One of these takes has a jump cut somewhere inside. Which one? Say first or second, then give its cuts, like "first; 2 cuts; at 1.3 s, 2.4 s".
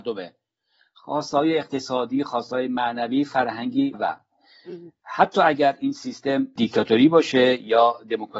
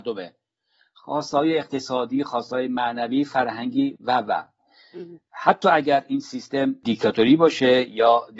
first; 1 cut; at 3.9 s